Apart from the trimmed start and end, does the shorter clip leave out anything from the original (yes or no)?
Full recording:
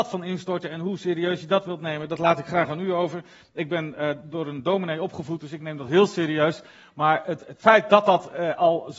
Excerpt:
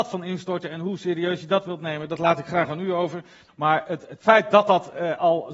yes